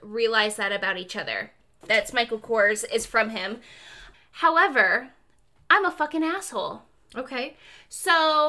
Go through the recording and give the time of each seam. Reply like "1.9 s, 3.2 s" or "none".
1.8 s, 4.1 s